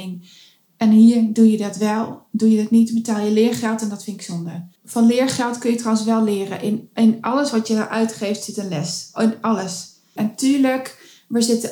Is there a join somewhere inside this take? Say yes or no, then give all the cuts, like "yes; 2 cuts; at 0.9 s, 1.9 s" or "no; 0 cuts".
yes; 2 cuts; at 4.8 s, 10.2 s